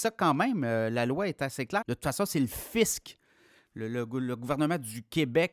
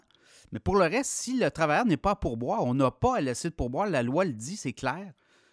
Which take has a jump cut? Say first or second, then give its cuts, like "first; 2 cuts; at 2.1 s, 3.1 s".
first; 1 cut; at 1.8 s